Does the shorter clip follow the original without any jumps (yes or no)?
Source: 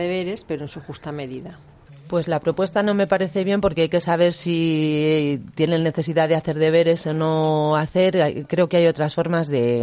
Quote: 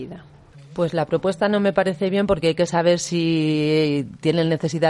yes